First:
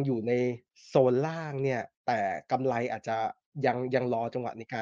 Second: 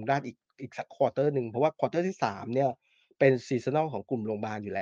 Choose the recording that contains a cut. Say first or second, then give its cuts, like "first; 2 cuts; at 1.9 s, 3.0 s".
first; 1 cut; at 2.0 s